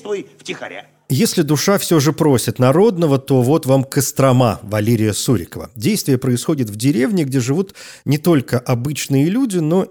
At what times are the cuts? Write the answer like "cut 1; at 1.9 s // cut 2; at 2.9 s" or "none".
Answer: none